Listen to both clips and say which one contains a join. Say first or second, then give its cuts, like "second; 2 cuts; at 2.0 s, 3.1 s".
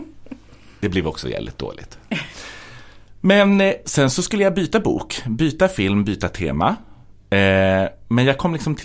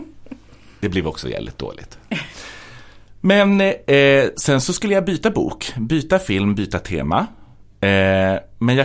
first; 1 cut; at 3.8 s